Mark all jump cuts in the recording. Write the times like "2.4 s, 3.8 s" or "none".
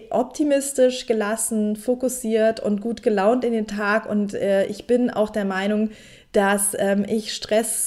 none